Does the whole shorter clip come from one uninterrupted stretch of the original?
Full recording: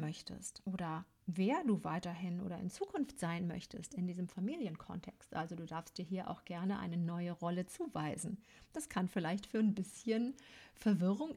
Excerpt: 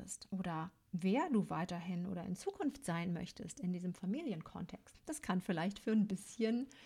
no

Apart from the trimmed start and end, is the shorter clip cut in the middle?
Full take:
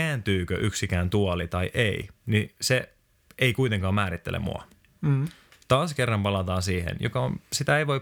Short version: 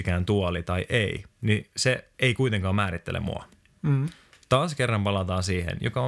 yes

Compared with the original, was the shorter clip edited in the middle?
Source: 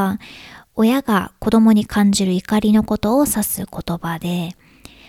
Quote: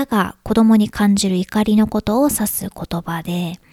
no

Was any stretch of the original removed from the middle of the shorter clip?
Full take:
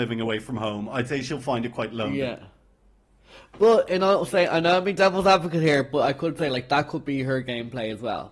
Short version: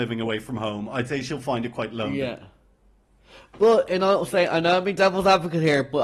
no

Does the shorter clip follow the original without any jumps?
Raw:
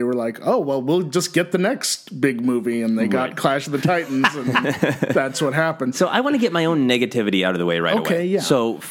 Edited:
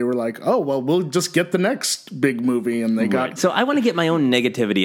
no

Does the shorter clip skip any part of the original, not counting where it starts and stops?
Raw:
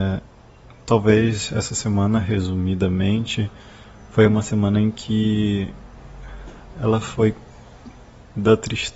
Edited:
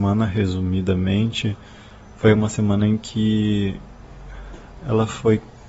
no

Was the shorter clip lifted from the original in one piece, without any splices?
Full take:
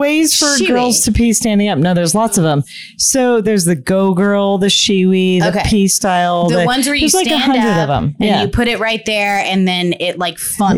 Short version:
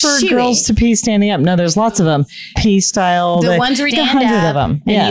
no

